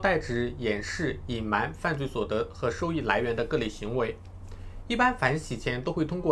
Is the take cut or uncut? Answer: uncut